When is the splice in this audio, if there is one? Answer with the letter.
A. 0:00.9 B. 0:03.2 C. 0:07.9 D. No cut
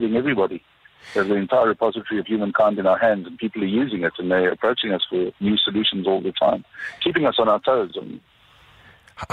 D